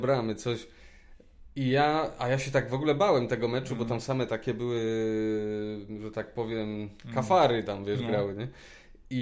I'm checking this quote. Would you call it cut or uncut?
uncut